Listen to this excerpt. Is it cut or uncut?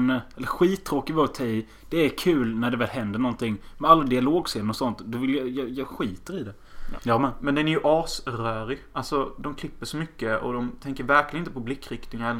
cut